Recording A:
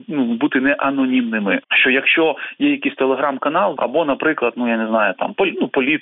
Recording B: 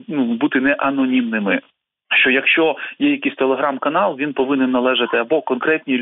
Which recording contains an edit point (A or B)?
A